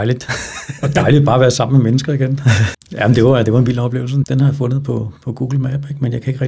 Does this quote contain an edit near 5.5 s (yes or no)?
no